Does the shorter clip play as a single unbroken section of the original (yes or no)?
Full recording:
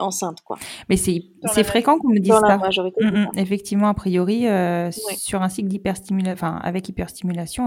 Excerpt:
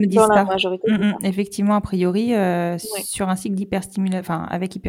yes